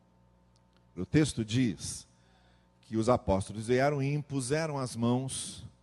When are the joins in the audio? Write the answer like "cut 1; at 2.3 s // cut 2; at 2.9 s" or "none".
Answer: cut 1; at 1.0 s